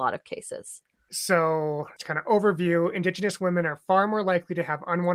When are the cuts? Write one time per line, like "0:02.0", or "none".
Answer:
0:02.0

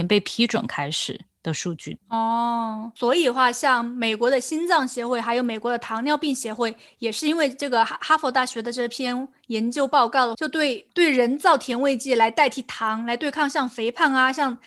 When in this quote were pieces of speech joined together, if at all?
none

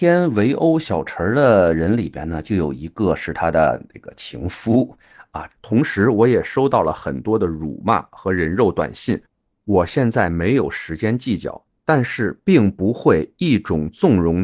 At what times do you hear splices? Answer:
0:05.5

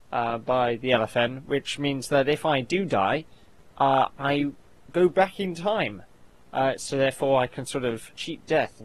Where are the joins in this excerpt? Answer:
none

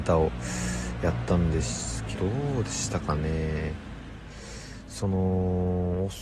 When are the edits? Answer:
0:02.1

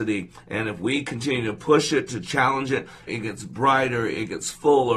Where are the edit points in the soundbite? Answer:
0:03.1

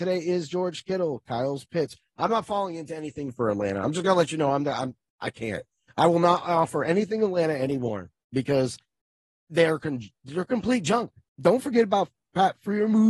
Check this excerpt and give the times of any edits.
0:11.3

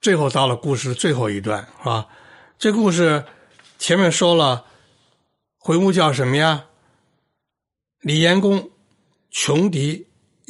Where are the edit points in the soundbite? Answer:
none

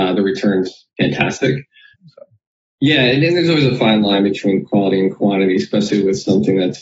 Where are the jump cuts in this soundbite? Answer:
0:01.9

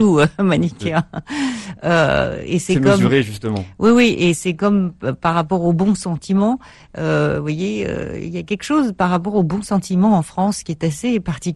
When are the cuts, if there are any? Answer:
none

